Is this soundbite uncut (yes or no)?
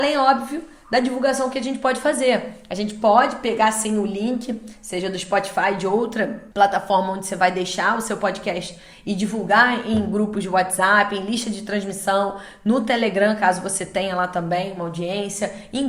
no